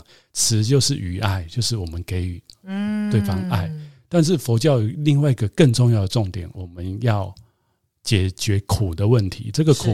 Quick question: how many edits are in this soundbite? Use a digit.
0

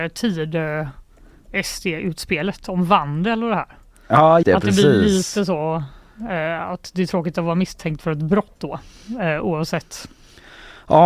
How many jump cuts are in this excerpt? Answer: 1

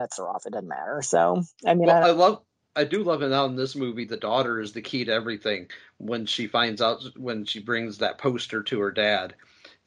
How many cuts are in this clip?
0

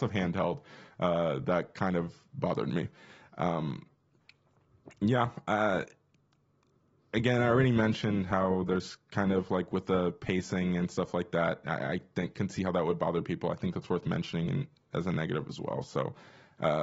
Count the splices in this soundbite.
0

